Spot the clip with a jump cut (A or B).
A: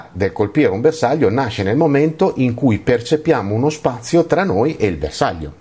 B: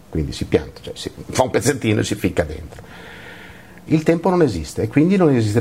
B